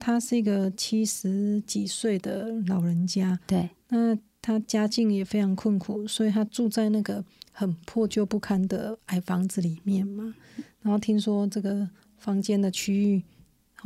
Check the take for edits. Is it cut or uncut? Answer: uncut